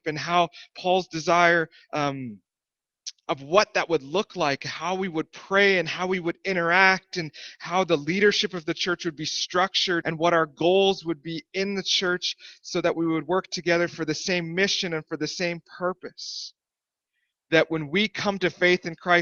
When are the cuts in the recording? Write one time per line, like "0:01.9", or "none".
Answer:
0:10.0
0:17.3

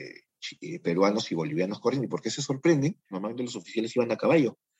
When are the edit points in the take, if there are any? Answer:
0:03.1

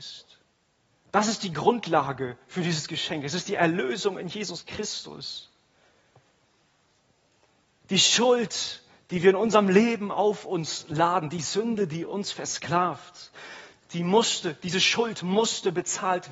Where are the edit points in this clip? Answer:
none

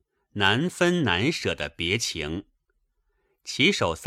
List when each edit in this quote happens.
none

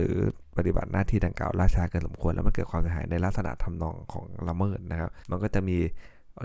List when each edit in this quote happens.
0:05.2

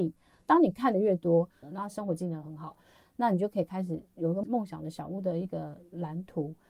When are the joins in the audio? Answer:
0:01.6

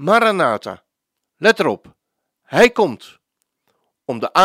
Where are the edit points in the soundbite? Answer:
0:01.2

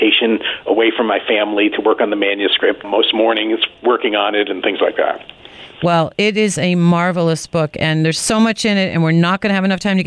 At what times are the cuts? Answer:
0:02.8

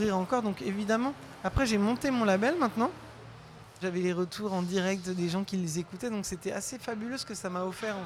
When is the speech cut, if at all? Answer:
0:03.8

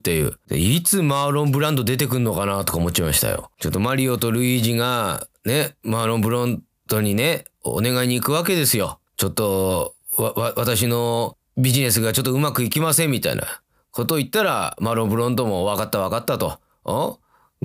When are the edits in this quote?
0:09.1

